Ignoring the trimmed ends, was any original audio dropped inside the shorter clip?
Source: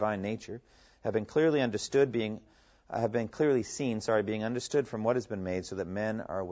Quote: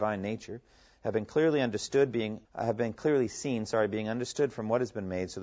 yes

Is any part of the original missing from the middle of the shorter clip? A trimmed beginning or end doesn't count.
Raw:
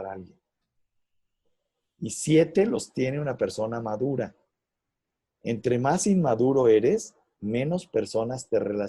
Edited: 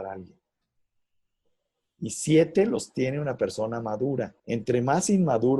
yes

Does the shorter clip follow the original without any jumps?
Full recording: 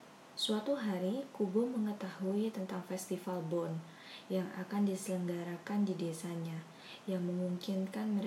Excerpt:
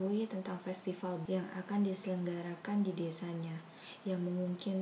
no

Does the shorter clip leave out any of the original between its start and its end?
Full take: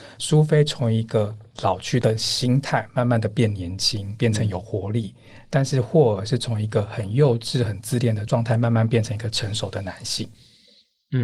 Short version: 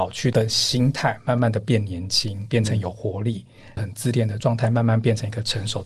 yes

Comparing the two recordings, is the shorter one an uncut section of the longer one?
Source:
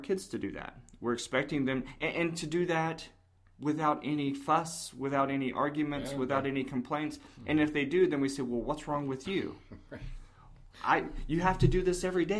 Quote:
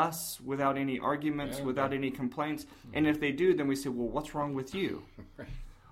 yes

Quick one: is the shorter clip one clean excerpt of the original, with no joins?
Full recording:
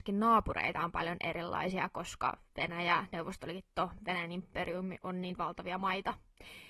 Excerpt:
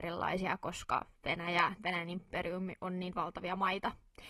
no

